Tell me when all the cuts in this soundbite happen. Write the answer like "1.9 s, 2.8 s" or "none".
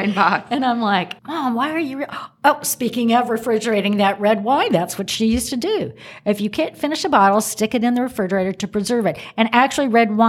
1.2 s